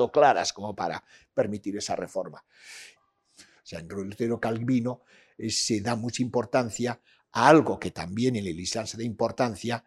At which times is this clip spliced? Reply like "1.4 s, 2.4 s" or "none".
3.0 s